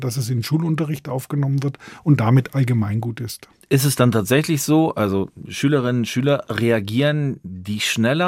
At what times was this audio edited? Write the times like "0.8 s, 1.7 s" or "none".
3.6 s